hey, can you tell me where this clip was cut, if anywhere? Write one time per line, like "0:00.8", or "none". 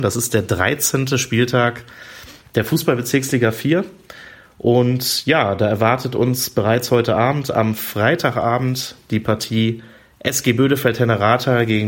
none